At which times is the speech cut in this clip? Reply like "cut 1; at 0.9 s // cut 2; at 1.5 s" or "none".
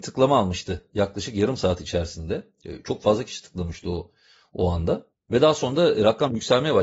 none